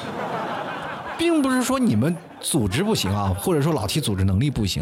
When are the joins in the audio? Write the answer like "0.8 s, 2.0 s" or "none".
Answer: none